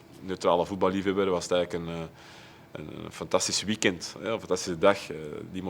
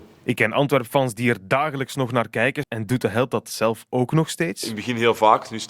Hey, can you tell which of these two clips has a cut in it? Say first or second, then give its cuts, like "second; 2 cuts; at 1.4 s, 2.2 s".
second; 1 cut; at 2.6 s